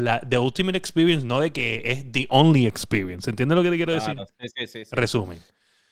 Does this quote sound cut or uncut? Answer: uncut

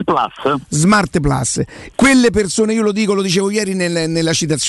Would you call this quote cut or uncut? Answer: cut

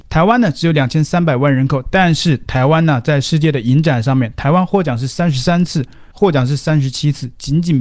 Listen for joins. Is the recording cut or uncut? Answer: cut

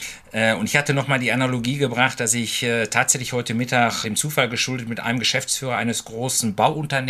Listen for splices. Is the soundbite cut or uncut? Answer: cut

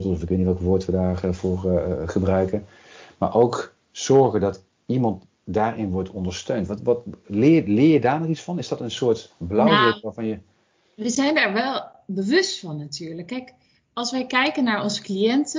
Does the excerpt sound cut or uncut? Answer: uncut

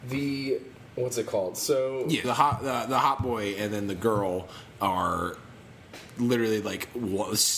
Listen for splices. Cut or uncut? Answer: cut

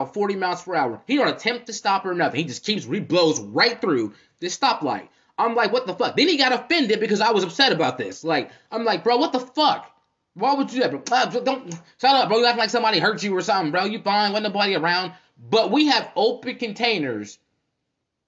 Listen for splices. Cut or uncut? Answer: uncut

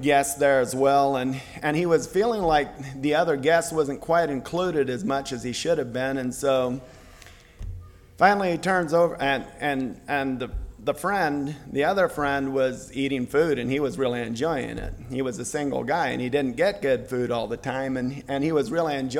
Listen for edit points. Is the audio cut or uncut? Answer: uncut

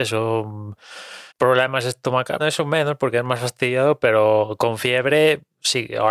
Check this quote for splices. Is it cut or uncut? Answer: cut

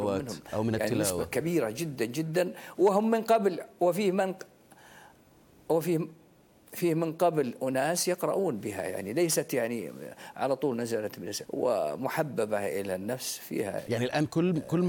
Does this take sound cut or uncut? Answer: cut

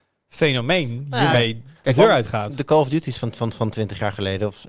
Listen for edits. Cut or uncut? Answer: uncut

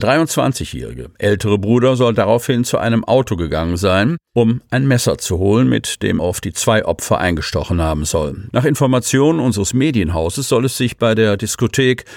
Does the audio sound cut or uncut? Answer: cut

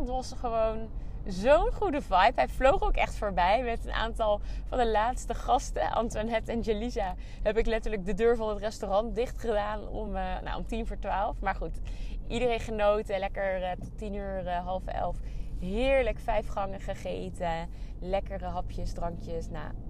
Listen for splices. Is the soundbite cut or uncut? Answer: uncut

